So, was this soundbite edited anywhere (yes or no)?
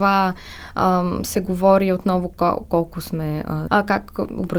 yes